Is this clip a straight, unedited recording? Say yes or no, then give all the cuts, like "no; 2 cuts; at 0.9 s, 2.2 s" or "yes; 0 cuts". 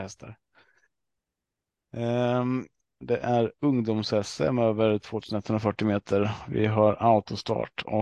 no; 1 cut; at 3.0 s